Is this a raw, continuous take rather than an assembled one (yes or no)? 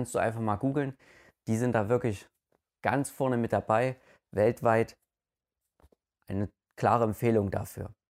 yes